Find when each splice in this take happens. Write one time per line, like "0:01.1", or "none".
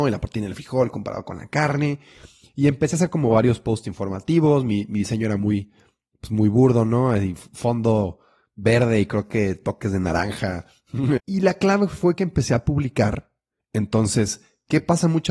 0:11.2
0:13.6